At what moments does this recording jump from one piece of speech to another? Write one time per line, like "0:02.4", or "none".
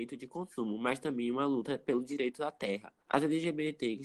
0:03.0